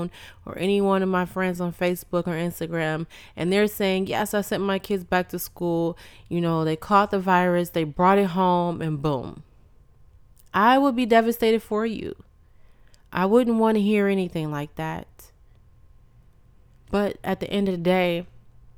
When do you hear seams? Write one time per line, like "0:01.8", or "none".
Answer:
none

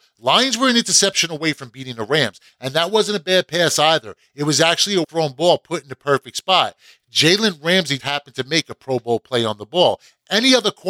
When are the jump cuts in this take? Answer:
0:05.0
0:08.0

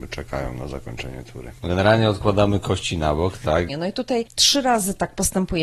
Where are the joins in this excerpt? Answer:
0:01.6
0:03.7

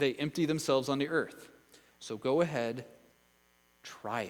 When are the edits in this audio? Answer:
0:01.9

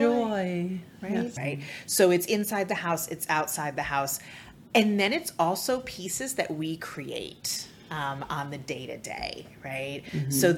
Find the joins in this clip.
0:01.4

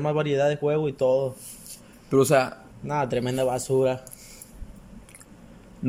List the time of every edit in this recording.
0:02.7

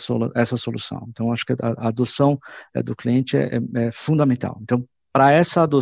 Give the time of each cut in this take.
none

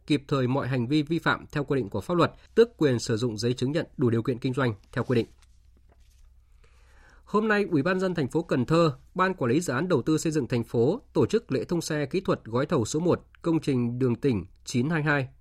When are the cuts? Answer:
0:02.5

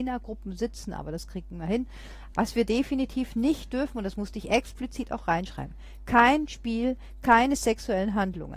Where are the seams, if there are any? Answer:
0:02.3

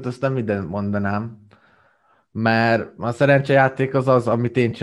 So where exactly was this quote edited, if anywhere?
none

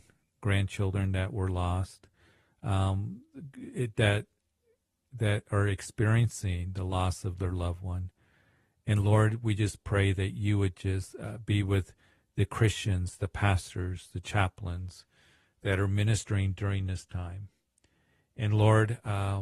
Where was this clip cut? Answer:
none

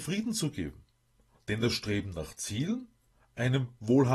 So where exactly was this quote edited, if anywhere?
0:01.3

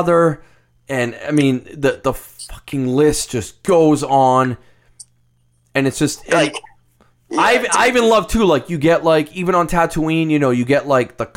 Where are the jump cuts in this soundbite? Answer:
none

